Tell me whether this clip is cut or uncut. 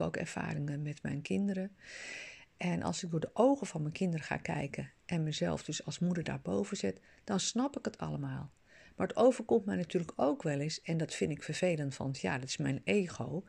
uncut